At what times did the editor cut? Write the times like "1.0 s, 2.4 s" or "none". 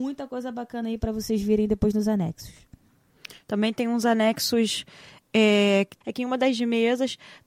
3.4 s, 6.0 s